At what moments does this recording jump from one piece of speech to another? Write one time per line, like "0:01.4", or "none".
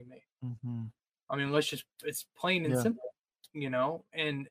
none